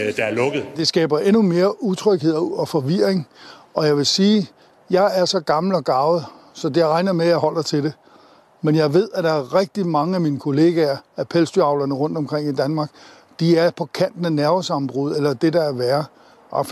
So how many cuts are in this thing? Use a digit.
0